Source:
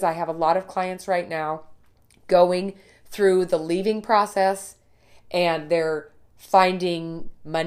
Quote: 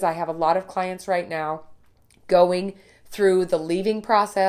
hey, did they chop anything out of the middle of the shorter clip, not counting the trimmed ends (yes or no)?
no